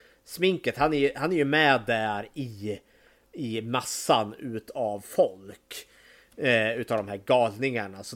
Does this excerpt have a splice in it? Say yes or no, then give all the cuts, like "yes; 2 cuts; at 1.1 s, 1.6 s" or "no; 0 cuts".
no; 0 cuts